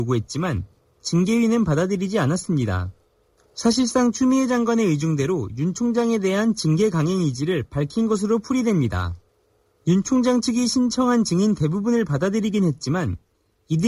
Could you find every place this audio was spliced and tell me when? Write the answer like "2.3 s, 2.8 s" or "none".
none